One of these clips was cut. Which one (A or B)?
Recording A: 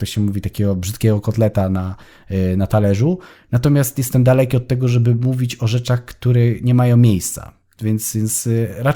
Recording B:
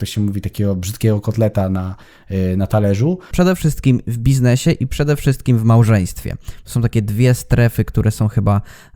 B